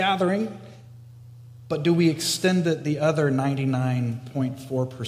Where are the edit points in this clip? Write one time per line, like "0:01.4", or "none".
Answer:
none